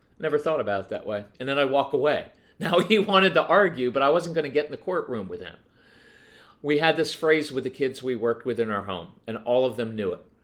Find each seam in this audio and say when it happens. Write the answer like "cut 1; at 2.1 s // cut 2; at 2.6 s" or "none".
cut 1; at 1.3 s

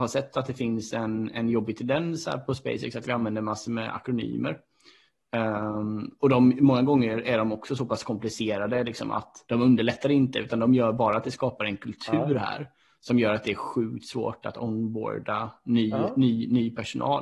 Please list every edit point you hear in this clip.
cut 1; at 9.4 s

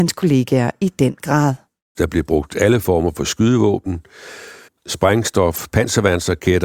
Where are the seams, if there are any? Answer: cut 1; at 1.9 s // cut 2; at 4.7 s

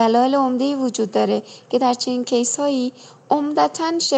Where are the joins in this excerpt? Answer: none

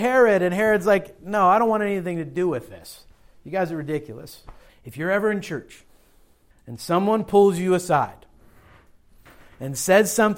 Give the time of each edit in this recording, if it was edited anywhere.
cut 1; at 4.7 s // cut 2; at 6.5 s

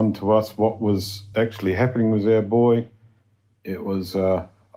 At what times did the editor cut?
none

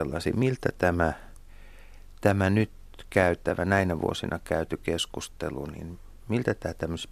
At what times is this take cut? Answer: none

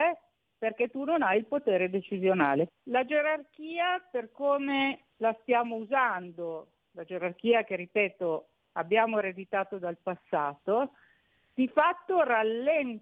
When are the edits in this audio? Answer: cut 1; at 2.7 s // cut 2; at 5.1 s

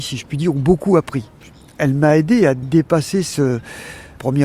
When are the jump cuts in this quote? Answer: none

